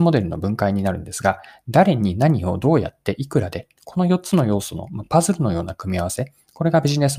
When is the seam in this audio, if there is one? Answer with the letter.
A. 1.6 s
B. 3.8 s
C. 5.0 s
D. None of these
D